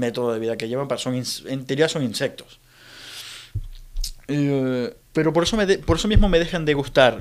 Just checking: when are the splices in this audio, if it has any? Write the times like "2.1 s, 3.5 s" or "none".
5.0 s